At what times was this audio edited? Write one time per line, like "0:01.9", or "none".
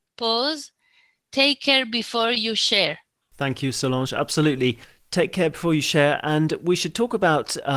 none

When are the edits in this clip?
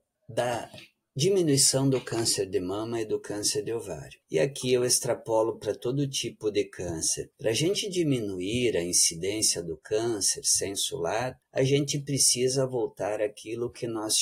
none

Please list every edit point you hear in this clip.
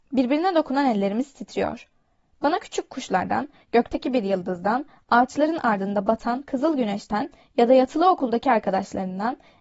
none

